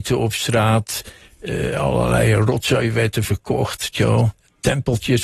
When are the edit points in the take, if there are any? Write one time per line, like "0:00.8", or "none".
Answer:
none